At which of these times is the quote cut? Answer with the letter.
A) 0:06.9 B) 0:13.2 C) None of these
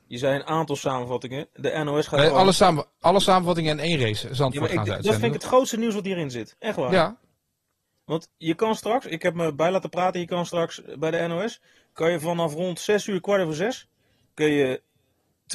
C